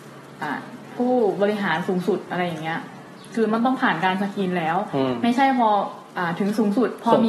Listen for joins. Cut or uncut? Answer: cut